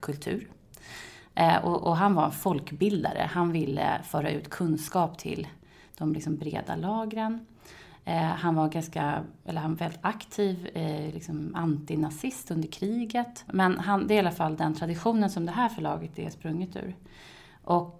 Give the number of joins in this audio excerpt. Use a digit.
1